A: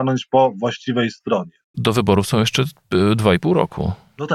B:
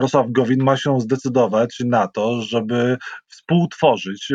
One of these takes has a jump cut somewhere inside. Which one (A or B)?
A